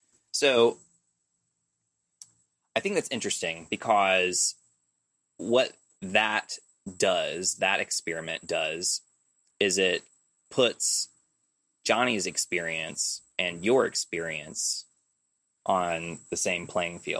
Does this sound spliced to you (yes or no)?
no